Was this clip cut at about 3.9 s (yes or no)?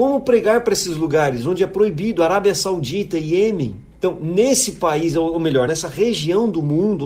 yes